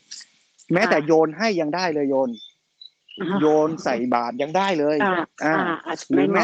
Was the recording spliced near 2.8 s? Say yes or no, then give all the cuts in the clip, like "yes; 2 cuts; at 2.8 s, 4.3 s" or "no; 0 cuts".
no; 1 cut; at 5.3 s